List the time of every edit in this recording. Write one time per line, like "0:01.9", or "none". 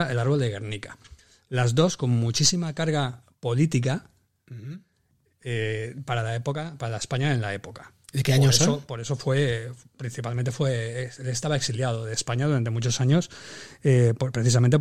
none